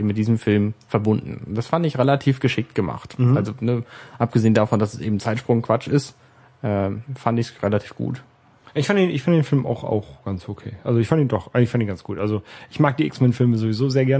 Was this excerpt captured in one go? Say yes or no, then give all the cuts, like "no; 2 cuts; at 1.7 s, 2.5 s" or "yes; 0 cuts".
yes; 0 cuts